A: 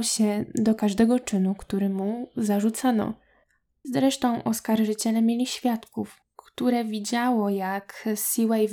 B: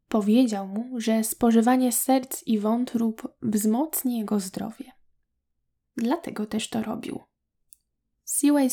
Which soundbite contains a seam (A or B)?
A